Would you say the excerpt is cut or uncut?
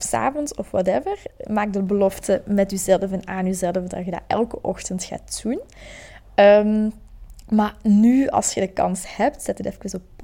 uncut